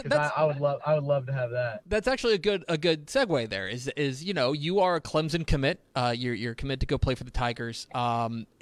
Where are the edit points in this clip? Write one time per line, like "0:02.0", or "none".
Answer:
none